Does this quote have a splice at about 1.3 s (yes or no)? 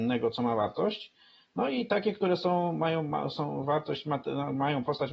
no